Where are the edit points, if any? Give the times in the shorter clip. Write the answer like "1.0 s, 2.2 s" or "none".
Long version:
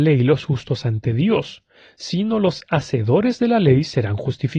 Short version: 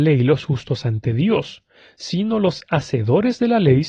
none